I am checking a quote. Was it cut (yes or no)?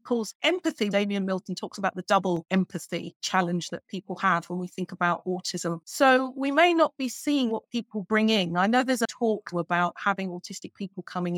yes